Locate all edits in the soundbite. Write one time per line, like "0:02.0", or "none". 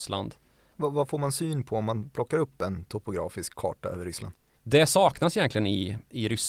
0:04.5